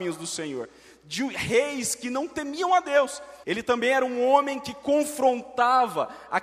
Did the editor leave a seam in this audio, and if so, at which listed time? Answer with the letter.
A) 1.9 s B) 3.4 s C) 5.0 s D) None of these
B